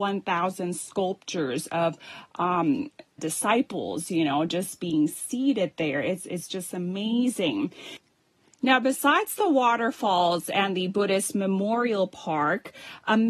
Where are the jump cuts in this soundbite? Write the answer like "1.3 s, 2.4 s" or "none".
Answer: 3.2 s